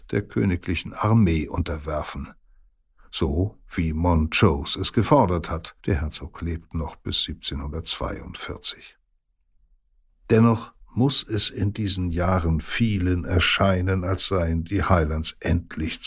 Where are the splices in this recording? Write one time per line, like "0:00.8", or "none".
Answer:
0:05.8
0:10.1